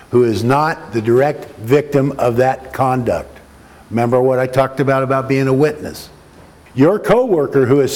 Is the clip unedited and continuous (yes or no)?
no